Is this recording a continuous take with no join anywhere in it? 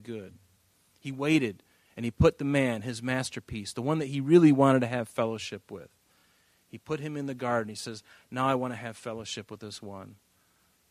yes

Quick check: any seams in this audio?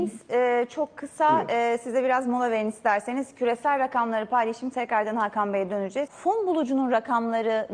yes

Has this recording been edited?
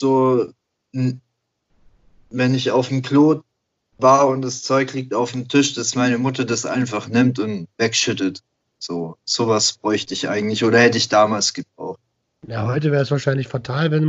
no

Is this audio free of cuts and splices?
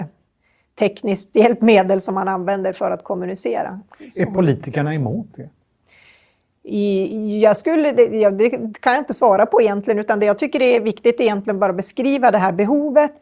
yes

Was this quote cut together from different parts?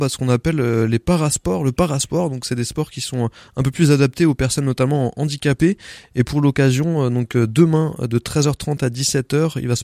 no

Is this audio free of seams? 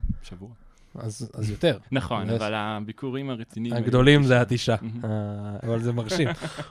no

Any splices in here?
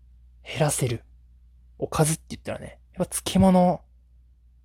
no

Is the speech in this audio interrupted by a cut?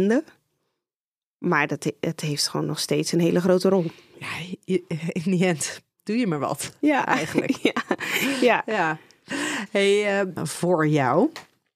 yes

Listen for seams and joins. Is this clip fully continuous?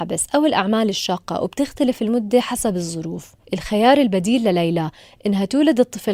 no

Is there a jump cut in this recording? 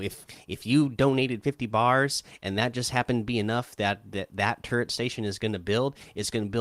no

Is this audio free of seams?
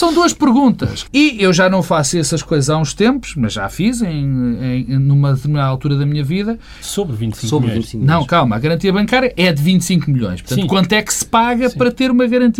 no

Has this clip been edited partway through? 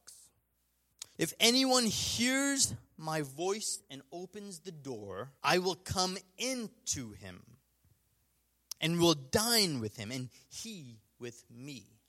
yes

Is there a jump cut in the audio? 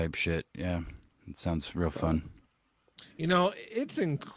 no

